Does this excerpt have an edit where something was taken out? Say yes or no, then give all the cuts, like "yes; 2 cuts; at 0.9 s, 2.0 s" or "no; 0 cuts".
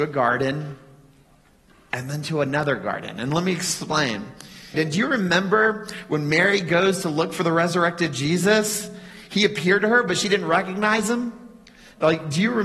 yes; 1 cut; at 4.7 s